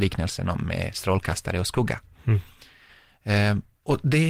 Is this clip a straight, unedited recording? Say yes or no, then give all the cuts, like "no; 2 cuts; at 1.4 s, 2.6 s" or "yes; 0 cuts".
yes; 0 cuts